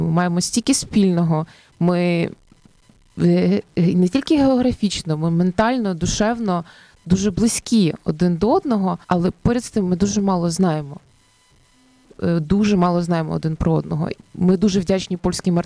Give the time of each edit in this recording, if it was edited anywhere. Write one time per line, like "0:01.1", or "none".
0:09.0
0:14.2